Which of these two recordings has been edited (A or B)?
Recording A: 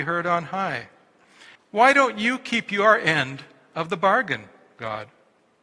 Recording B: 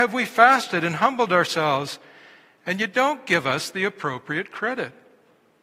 A